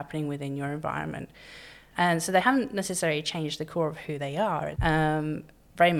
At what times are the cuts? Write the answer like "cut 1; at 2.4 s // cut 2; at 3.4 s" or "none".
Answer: cut 1; at 1.9 s // cut 2; at 4.8 s